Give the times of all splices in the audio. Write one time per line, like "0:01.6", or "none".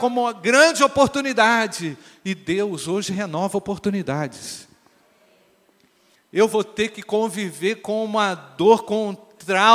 0:06.2